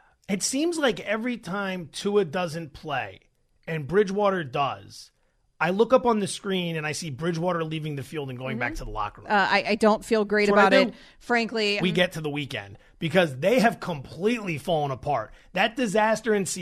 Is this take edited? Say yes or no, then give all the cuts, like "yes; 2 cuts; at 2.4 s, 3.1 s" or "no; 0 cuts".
yes; 2 cuts; at 9.2 s, 11.8 s